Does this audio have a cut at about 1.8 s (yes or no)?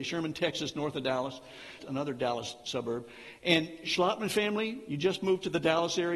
yes